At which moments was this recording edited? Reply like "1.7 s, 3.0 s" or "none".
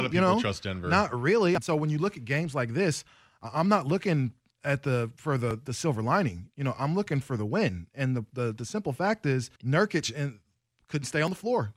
1.6 s, 9.6 s